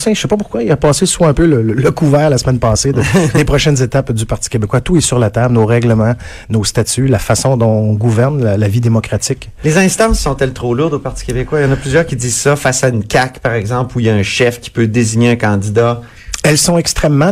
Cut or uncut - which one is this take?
uncut